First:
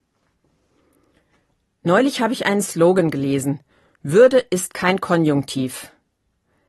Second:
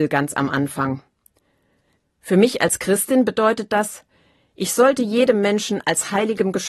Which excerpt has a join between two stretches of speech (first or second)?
second